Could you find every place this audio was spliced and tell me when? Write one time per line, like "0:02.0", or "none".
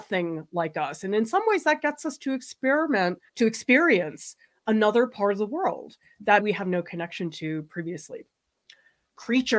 0:03.3
0:06.4

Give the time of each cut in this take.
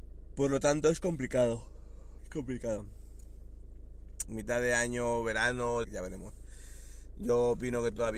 0:02.2
0:04.3
0:05.8

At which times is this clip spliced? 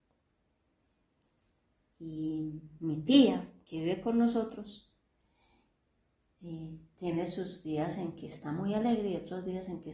none

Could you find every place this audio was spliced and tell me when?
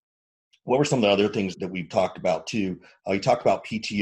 0:01.5

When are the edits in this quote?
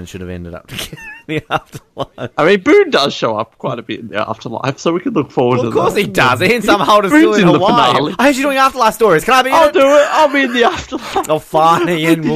none

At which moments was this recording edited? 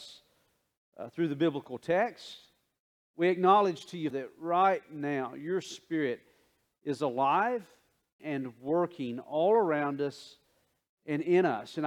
0:04.1
0:08.2

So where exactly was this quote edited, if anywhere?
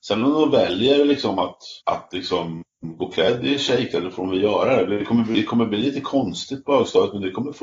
0:01.8

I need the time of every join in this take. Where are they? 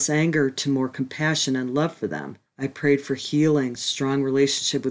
0:02.5
0:03.8

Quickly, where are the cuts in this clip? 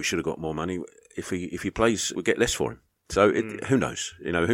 0:02.1

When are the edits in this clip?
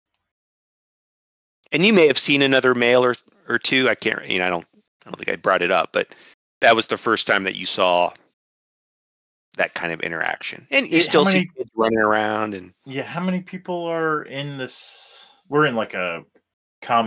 none

